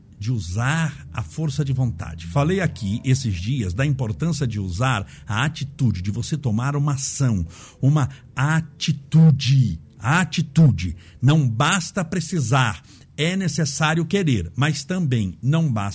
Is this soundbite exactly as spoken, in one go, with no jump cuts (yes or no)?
yes